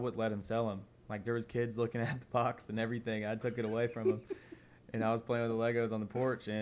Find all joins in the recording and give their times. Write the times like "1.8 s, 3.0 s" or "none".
none

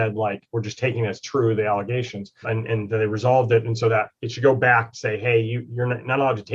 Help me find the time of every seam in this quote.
2.4 s

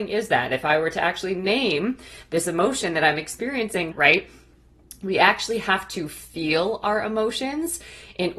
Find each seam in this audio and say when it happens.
3.9 s

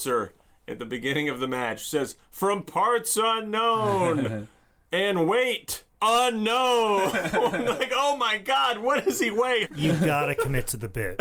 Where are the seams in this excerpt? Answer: 9.7 s

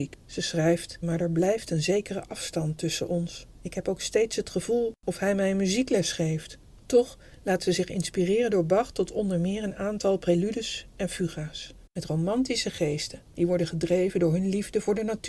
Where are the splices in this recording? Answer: 1.0 s, 6.8 s, 11.9 s

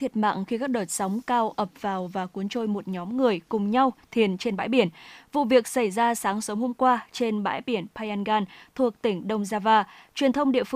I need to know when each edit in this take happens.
none

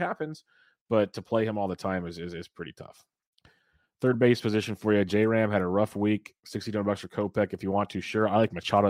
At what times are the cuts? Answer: none

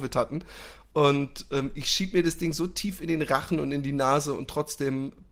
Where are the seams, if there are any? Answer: none

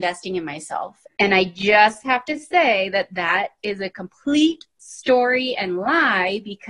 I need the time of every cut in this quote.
1.0 s

